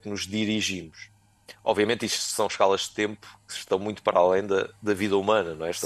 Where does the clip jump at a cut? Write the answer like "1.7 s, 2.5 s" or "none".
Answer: none